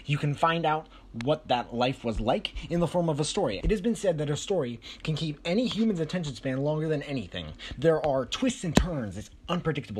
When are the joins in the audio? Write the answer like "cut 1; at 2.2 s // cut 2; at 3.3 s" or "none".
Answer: cut 1; at 3.6 s // cut 2; at 7.7 s